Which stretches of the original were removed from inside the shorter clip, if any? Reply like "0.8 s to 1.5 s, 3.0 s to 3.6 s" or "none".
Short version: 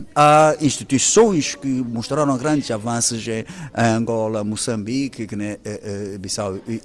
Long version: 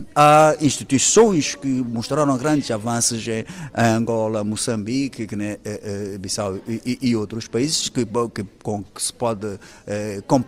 none

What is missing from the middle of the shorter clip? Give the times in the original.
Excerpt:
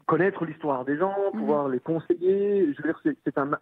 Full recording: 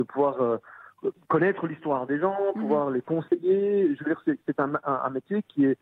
none

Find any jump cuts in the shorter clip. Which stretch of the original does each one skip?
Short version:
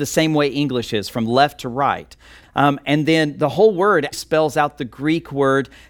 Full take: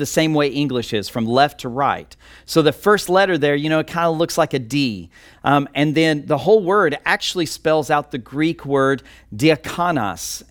2.4 s to 5.3 s, 7.0 s to 7.5 s

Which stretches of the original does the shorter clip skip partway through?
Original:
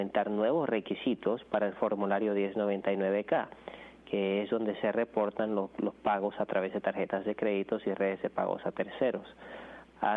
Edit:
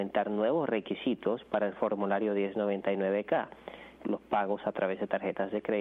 4.0 s to 5.7 s

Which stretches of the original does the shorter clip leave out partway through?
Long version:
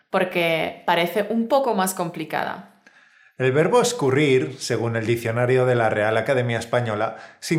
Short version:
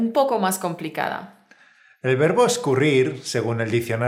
none

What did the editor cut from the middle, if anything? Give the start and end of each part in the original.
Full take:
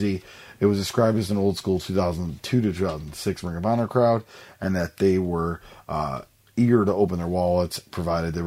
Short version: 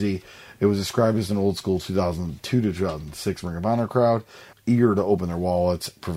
4.5 s to 6.4 s

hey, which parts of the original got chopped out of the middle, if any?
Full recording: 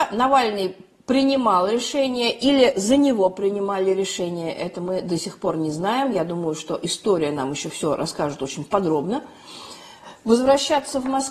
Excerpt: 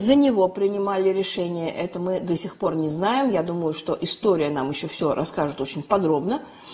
none

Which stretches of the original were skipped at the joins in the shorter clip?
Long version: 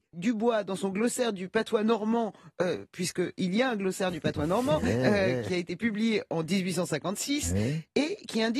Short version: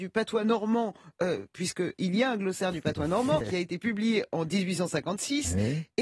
4.8 s to 5.4 s

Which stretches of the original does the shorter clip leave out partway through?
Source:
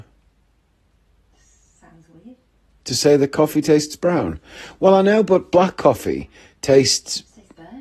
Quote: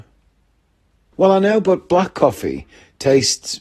1.1 s to 4.8 s

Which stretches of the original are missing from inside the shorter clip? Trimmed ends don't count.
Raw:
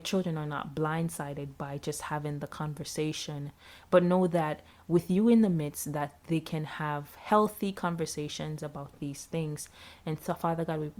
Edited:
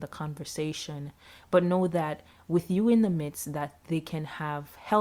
none

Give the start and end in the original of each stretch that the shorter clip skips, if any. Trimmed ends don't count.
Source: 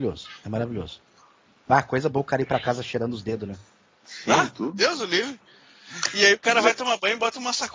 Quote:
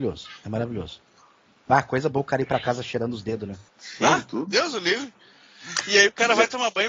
3.7 s to 3.9 s

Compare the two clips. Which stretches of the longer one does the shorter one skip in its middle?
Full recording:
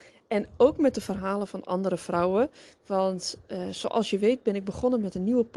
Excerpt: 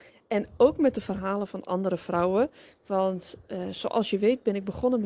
none

